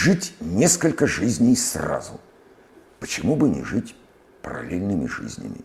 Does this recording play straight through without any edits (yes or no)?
yes